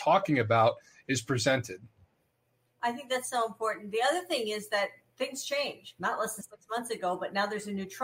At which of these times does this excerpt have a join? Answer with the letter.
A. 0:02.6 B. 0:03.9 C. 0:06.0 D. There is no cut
C